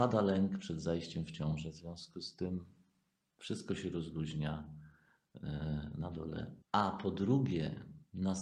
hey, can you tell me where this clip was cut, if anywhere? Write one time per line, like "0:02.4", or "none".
0:06.6